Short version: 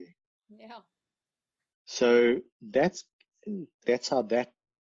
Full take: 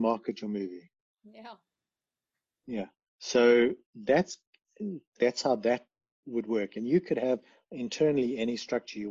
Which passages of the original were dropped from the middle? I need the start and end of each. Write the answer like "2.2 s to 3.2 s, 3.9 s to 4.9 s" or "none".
2.5 s to 3.1 s